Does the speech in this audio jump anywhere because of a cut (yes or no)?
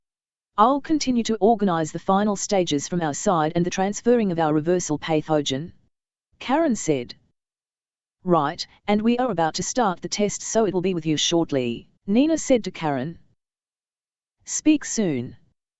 yes